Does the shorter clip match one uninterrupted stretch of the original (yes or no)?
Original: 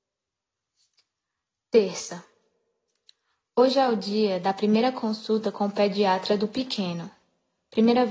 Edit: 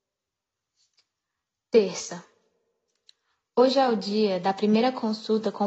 yes